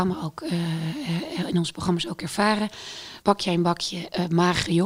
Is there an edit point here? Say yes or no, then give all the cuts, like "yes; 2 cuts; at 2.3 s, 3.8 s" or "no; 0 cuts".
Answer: yes; 1 cut; at 3.2 s